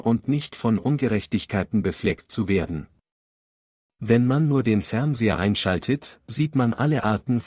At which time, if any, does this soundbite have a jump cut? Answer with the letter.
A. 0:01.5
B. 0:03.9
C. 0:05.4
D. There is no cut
D